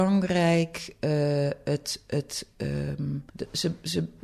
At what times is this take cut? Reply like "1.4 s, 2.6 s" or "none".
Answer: 3.3 s